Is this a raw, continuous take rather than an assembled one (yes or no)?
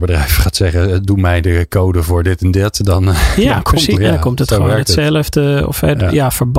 no